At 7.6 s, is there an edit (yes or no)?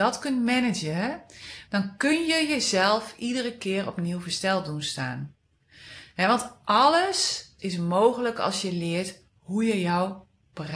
yes